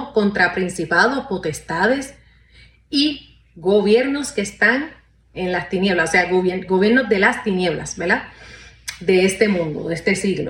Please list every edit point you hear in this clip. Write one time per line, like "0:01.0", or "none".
0:05.3